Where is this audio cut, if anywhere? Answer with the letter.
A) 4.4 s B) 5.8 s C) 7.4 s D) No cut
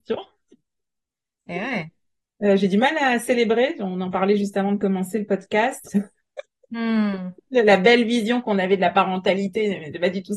B